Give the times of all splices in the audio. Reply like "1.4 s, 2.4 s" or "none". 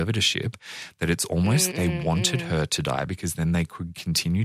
1.7 s